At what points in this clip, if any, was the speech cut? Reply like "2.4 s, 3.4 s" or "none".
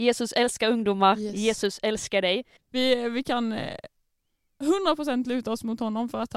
2.6 s

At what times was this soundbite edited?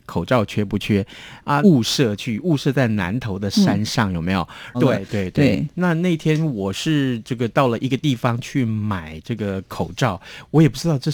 1.6 s, 4.7 s

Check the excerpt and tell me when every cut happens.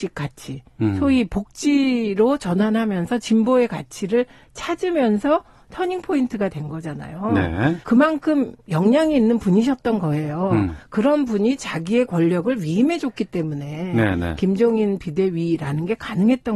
7.8 s

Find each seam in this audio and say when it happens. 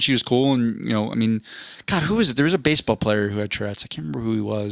none

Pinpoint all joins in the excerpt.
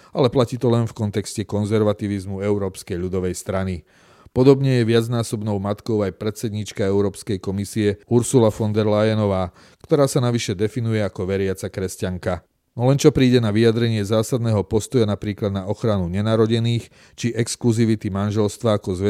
none

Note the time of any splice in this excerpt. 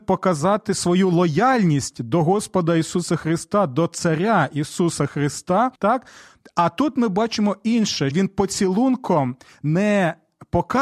5.7 s, 8.1 s

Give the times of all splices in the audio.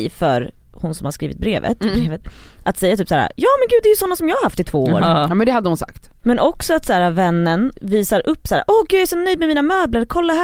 6.2 s, 7.7 s

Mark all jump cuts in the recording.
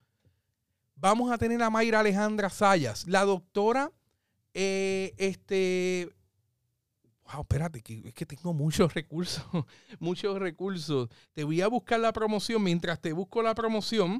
none

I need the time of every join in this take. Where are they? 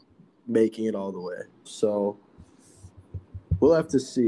1.7 s

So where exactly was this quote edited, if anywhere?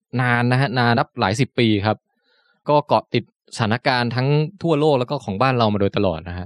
0.9 s, 2.6 s

